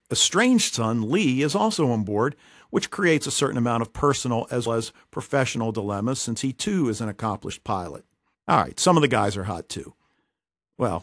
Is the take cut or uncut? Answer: cut